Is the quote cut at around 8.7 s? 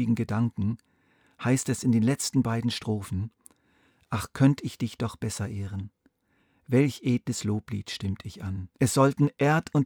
yes; 1 cut; at 8.7 s

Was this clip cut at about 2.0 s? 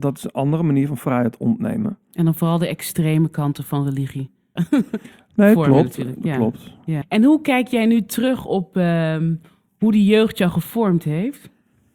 no; 2 cuts; at 4.6 s, 7.0 s

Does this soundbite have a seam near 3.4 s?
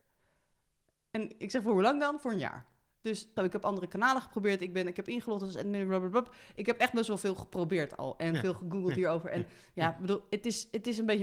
yes; 1 cut; at 3.4 s

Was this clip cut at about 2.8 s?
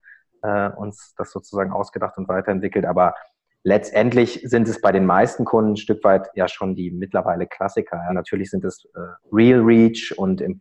no; 2 cuts; at 8.1 s, 9.2 s

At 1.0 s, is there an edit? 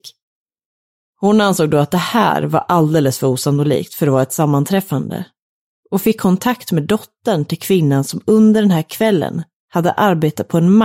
yes; 1 cut; at 1.0 s

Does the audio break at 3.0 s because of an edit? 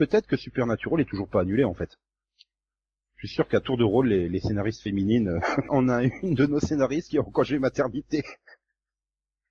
no; 1 cut; at 5.7 s

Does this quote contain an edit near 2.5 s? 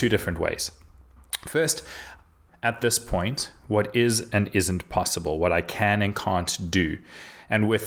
yes; 1 cut; at 2.5 s

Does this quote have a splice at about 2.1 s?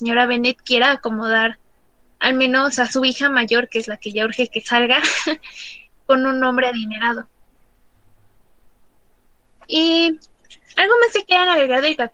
no; 1 cut; at 6.0 s

